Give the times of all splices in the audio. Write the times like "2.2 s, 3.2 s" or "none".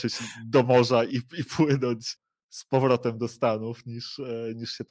1.1 s